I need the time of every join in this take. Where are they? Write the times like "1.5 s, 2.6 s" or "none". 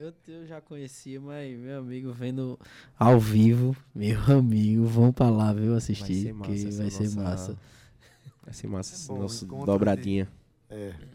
none